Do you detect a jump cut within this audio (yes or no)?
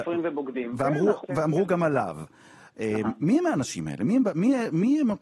yes